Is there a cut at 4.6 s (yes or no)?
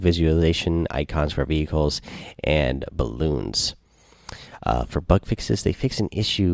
no